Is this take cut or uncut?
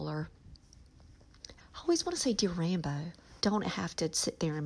cut